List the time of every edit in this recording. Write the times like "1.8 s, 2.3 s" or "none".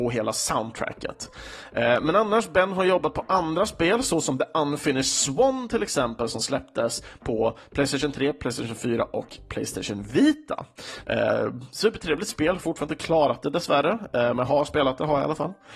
11.0 s